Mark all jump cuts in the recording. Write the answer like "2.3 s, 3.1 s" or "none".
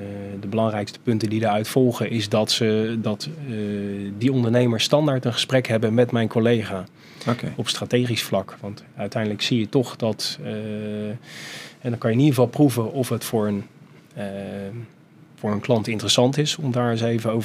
none